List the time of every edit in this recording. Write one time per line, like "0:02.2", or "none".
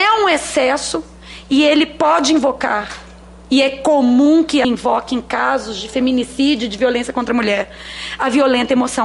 0:04.6

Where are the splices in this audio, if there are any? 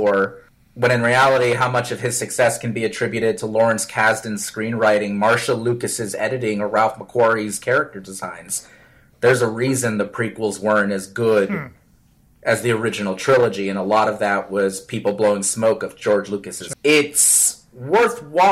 0:16.7

